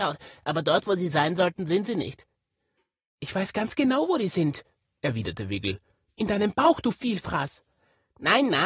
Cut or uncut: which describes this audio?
uncut